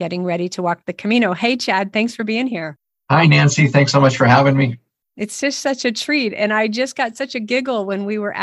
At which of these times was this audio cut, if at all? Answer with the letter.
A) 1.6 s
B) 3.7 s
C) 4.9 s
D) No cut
D